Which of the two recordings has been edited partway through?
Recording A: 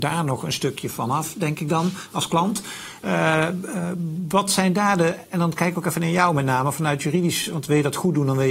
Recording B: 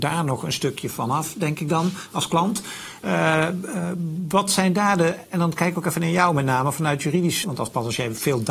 B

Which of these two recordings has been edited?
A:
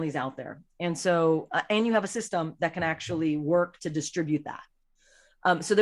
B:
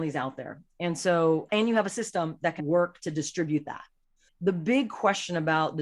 B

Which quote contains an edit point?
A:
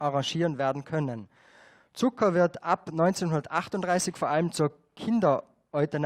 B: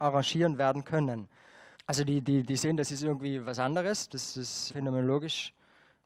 B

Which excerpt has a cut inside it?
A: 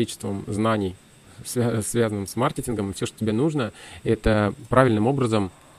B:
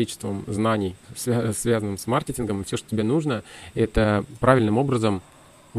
B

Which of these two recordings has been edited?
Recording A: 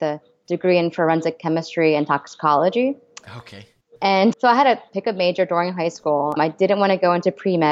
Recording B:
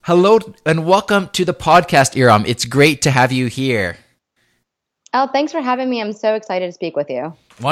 A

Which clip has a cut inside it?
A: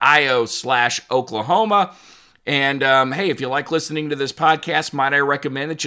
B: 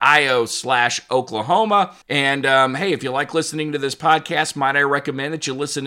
B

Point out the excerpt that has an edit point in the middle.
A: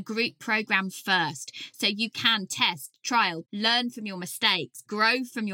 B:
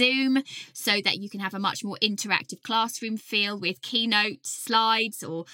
A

